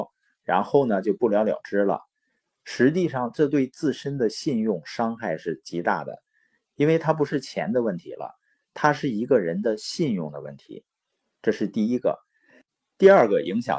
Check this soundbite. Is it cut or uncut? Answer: cut